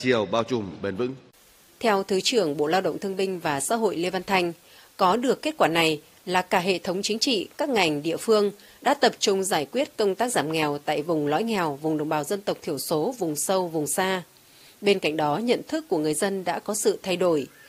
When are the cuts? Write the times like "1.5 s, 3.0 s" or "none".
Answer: 7.5 s